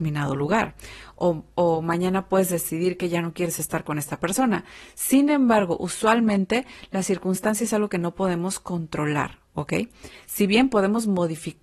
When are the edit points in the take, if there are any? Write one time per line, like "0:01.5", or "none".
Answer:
none